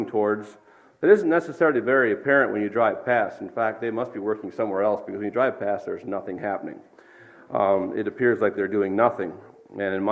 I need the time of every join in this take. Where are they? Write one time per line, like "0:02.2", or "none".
none